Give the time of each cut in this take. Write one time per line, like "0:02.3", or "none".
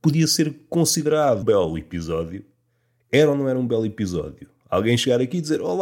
0:01.4